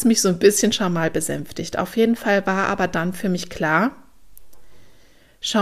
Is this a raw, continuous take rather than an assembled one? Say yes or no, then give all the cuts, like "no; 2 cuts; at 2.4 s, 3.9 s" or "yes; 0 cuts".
yes; 0 cuts